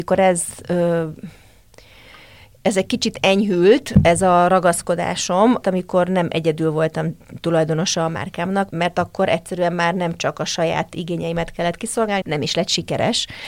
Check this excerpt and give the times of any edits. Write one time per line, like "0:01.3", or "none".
0:05.6
0:08.7
0:12.2